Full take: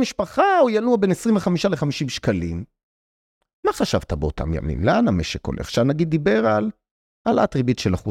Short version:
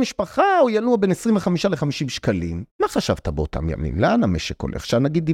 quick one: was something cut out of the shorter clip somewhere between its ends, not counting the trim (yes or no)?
yes